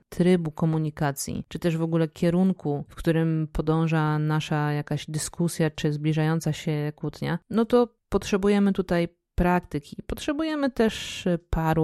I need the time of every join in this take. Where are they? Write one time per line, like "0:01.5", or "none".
none